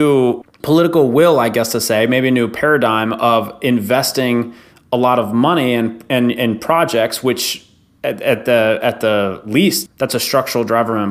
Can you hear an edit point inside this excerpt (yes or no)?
no